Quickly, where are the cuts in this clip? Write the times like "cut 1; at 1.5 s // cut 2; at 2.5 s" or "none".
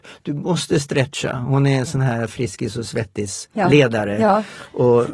none